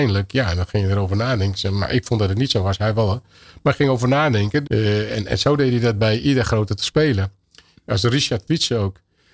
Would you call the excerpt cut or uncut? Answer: cut